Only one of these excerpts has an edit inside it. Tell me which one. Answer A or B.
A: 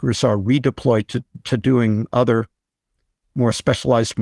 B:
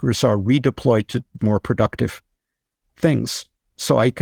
B